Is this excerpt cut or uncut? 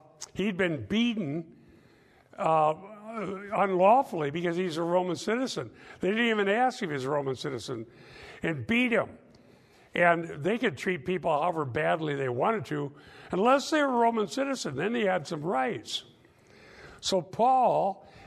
uncut